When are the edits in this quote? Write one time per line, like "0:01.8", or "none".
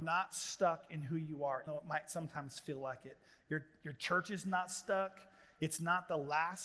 0:01.7